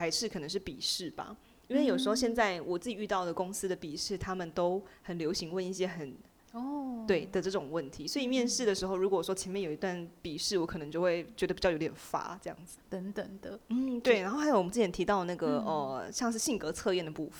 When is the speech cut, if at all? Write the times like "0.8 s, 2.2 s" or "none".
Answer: 6.4 s, 12.8 s